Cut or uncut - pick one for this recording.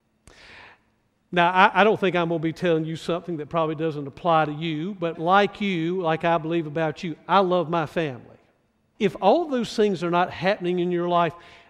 cut